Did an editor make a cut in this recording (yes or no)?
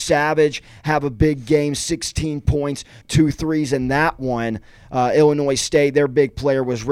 yes